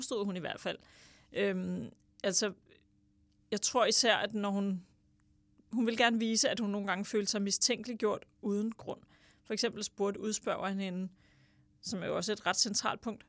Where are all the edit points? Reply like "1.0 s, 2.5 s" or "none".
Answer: none